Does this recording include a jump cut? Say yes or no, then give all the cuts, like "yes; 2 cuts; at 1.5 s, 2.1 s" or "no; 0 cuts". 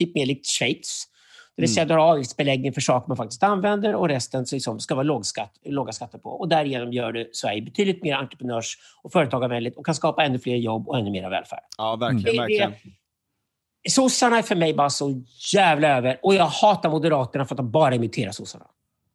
no; 0 cuts